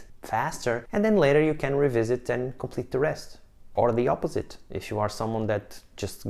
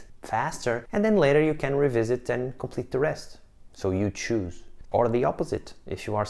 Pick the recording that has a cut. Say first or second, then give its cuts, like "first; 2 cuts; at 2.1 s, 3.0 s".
second; 2 cuts; at 3.7 s, 4.8 s